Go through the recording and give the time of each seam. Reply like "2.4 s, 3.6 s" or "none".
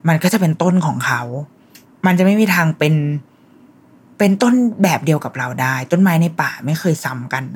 none